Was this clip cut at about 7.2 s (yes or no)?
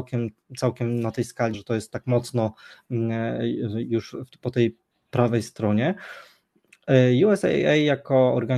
no